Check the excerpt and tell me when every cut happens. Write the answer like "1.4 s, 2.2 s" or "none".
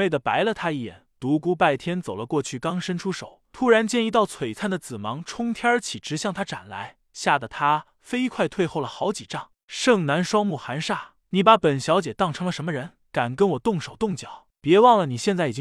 none